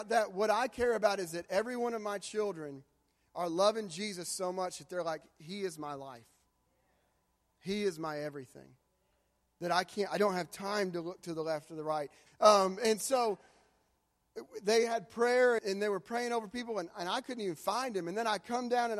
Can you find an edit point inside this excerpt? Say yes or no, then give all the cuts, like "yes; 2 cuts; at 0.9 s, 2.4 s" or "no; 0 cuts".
yes; 2 cuts; at 12.3 s, 15.6 s